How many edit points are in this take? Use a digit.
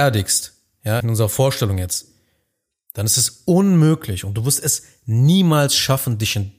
1